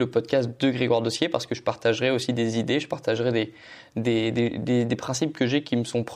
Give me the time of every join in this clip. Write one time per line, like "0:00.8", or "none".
none